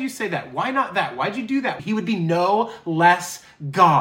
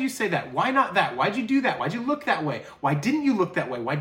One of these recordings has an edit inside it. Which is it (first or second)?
first